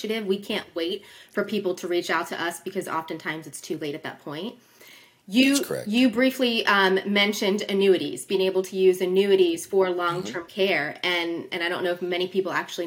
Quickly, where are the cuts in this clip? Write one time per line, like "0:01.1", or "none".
none